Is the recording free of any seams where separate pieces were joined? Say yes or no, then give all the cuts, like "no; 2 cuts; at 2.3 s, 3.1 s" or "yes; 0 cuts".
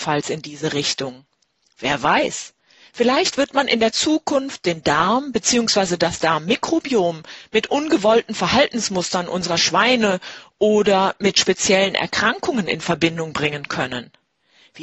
yes; 0 cuts